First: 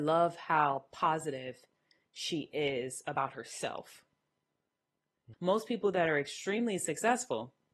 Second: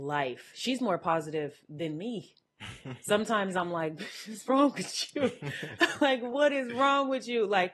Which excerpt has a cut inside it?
first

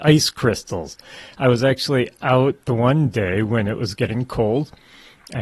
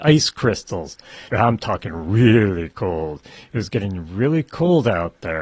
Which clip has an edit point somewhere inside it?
second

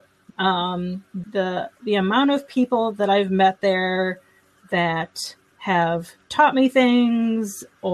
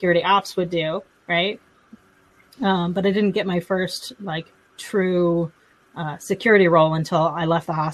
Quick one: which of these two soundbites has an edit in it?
first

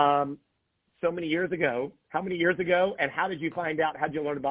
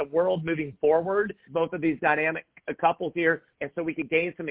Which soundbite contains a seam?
second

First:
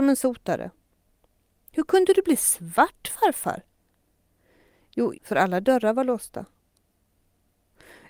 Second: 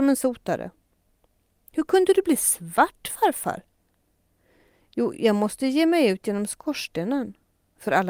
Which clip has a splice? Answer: first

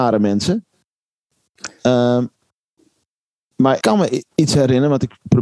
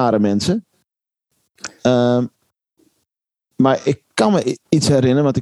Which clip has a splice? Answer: first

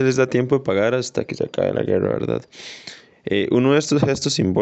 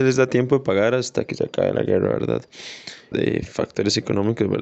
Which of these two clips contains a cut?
second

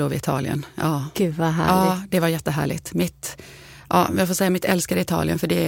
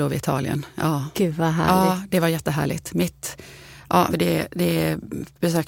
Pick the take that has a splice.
second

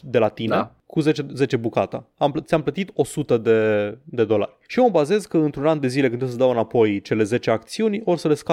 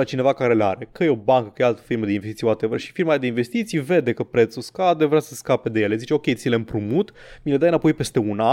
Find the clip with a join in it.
first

